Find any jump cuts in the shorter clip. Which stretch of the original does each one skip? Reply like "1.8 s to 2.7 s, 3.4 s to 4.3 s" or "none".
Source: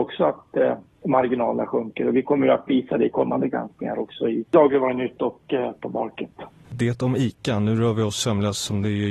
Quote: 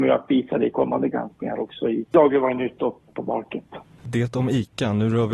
5.5 s to 5.7 s